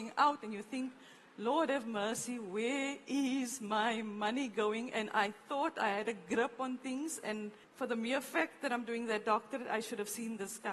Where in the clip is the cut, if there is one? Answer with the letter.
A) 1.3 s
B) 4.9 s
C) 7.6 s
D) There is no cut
C